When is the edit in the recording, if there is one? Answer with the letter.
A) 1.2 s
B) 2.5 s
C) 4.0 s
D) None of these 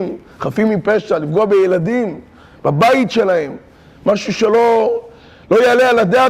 D